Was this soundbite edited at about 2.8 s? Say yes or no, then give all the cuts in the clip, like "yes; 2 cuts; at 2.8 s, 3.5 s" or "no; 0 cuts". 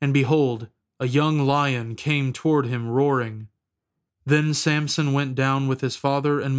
no; 1 cut; at 4.1 s